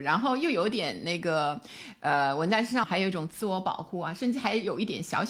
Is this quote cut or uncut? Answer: cut